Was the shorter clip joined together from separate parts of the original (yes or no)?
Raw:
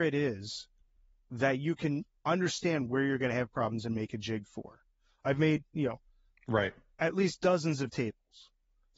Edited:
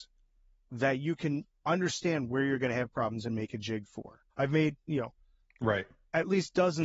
yes